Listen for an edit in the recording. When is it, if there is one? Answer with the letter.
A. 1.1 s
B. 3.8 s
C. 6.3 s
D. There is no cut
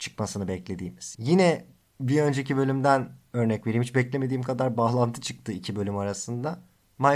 A